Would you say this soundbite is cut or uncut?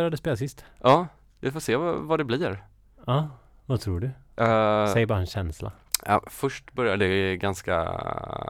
uncut